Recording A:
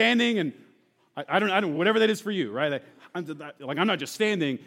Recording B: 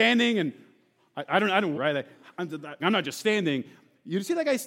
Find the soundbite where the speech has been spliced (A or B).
B